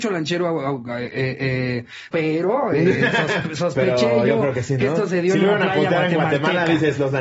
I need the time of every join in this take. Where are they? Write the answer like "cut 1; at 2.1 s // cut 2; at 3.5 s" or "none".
cut 1; at 2.1 s